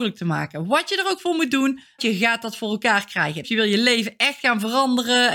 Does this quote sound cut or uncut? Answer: cut